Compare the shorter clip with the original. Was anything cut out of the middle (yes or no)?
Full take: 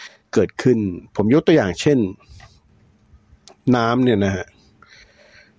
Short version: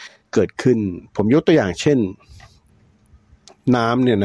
no